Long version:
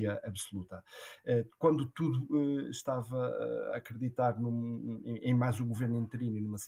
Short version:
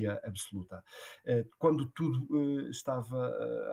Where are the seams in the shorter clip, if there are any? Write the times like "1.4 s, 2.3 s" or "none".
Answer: none

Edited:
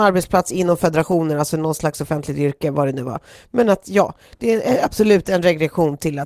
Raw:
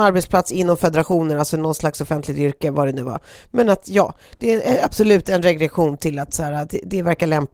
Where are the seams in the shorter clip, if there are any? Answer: none

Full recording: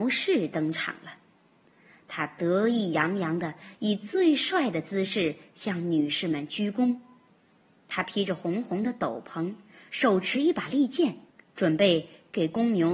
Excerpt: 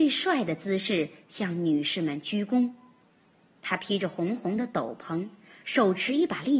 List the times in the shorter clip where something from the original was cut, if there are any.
none

